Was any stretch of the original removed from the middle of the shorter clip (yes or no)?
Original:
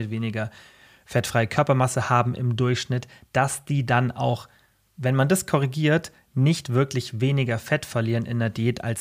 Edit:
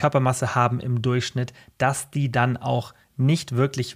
yes